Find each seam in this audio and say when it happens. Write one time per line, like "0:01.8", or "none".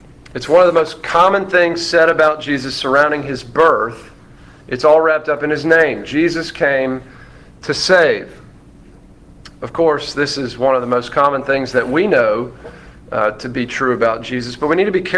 none